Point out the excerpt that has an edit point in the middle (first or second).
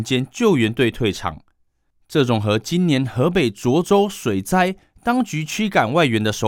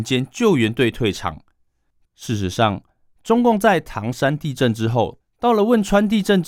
second